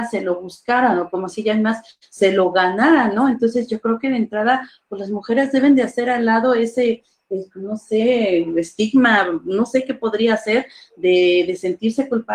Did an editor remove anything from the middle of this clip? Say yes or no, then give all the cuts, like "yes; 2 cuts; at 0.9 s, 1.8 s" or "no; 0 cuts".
no; 0 cuts